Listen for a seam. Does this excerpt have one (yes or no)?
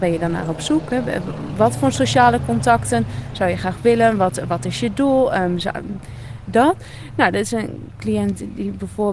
no